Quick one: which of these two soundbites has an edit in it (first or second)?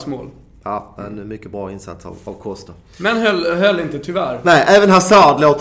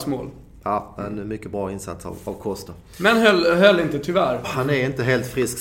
second